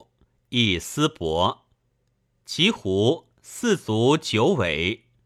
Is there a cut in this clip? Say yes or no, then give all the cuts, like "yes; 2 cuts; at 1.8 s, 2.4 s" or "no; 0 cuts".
no; 0 cuts